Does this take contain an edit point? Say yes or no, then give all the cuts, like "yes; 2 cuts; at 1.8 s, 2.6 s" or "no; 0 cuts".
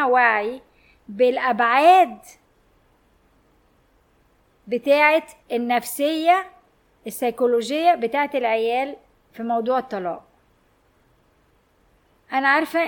yes; 1 cut; at 5.4 s